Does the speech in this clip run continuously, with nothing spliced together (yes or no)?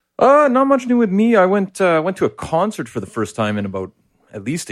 yes